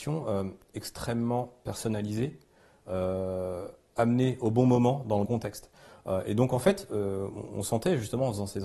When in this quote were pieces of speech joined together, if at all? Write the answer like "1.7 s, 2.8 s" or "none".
5.2 s